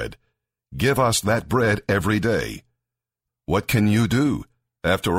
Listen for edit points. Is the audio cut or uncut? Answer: cut